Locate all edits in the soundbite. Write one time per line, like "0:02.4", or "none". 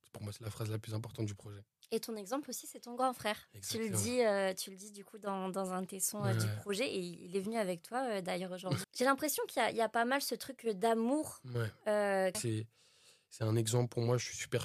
0:08.8
0:12.3